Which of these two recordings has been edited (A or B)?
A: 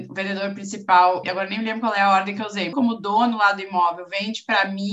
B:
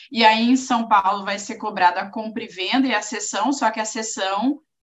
A